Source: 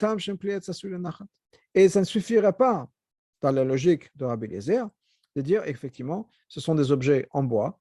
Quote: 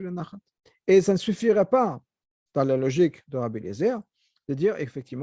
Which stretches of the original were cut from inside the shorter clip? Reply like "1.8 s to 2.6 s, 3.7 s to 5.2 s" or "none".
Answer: none